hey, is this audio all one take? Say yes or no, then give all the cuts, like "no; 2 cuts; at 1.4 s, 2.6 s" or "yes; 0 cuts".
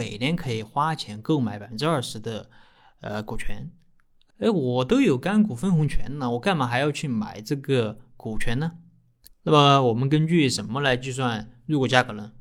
no; 2 cuts; at 4.3 s, 9.3 s